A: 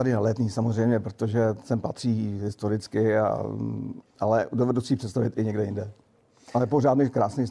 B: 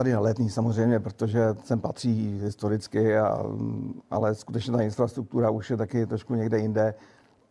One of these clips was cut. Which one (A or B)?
A